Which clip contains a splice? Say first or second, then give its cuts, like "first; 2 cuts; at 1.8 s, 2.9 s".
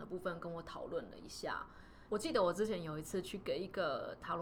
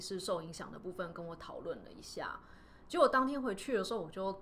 first; 1 cut; at 2.1 s